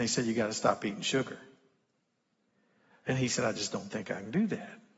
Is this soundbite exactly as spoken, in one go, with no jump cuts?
yes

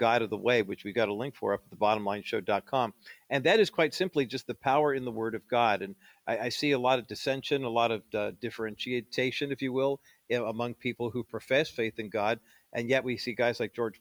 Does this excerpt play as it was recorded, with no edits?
yes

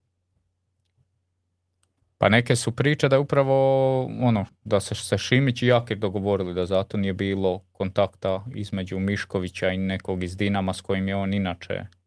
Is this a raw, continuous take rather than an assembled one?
no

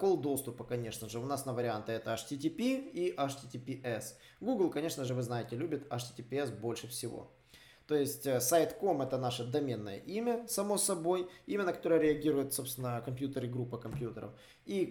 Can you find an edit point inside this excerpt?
no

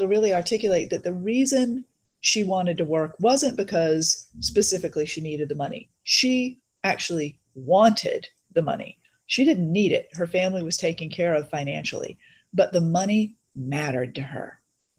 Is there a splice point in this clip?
no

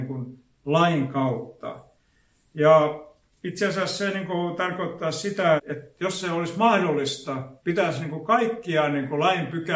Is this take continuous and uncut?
no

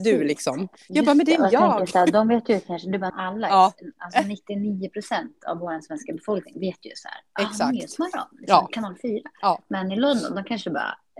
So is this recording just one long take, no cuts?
no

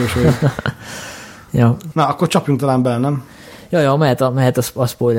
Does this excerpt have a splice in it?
no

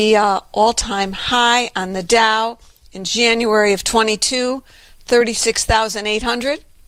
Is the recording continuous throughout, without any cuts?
yes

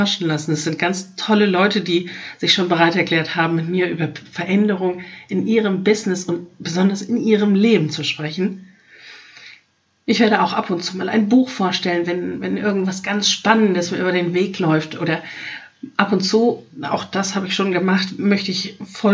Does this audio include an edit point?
no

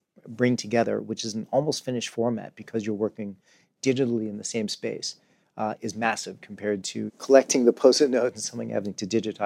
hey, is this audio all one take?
no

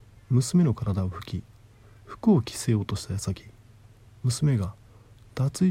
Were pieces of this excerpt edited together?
no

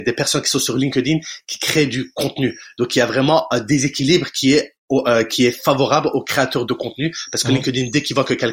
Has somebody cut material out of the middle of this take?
no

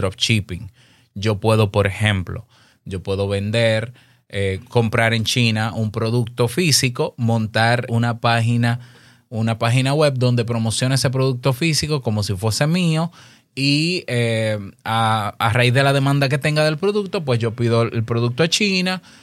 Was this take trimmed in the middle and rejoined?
yes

